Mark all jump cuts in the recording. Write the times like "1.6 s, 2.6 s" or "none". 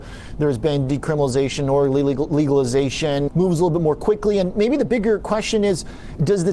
3.3 s